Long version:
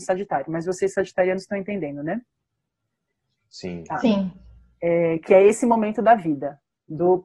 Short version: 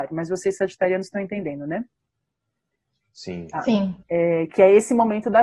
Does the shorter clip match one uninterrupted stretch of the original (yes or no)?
no